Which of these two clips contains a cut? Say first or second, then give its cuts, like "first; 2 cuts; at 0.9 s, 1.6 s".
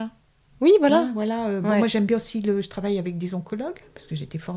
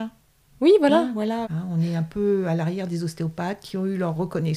second; 1 cut; at 1.4 s